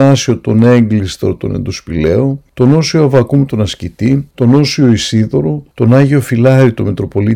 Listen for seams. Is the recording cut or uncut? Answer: cut